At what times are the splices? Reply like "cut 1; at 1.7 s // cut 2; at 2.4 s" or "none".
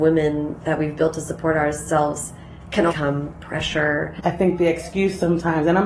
cut 1; at 2.9 s // cut 2; at 4.2 s